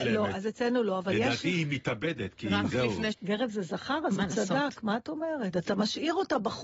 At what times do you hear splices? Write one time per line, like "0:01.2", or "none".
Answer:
0:03.1
0:05.5

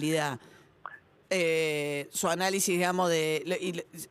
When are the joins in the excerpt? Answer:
0:01.2

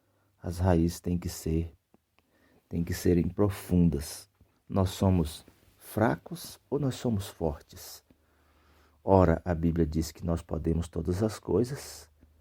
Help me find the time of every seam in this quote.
0:04.5

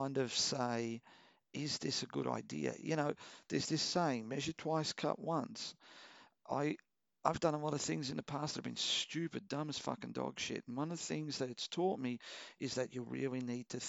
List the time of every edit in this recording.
none

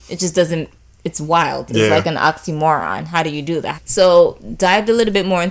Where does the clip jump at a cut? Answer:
0:03.7

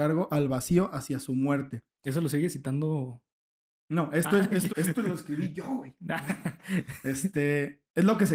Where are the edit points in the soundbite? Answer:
0:04.7

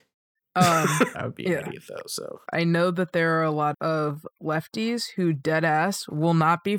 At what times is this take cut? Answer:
0:01.1
0:02.4
0:03.7

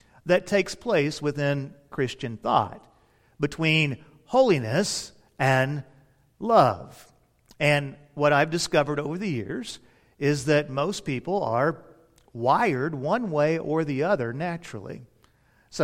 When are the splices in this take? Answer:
none

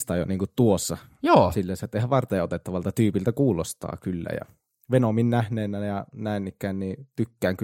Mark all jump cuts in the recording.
none

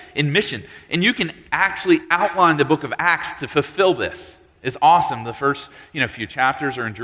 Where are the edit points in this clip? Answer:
none

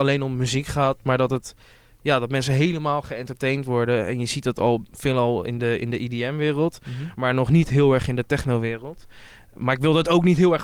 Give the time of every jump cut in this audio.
none

